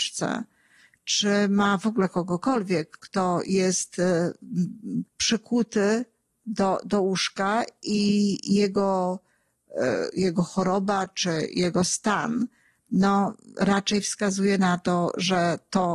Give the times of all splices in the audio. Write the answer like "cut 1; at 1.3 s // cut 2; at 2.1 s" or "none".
cut 1; at 3.0 s // cut 2; at 5.1 s